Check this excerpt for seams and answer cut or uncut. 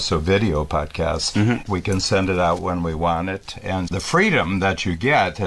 cut